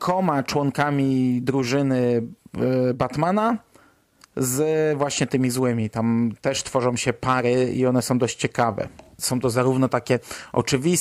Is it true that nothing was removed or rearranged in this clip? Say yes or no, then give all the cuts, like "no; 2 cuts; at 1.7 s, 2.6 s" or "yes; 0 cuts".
no; 1 cut; at 9.2 s